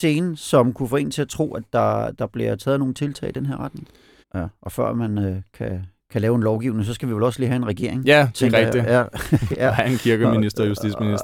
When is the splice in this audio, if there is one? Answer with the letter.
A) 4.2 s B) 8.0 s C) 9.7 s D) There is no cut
A